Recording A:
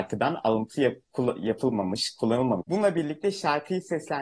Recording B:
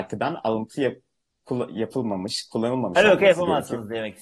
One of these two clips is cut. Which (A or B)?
A